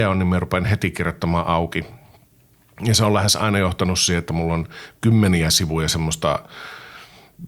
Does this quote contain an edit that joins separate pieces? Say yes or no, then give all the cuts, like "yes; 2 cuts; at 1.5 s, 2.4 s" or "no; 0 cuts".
no; 0 cuts